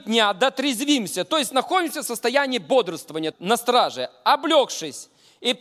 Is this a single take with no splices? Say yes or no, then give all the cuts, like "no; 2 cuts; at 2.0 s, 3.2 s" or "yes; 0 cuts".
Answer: no; 1 cut; at 3.3 s